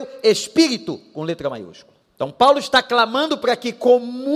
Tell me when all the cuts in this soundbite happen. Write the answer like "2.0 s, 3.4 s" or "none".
2.0 s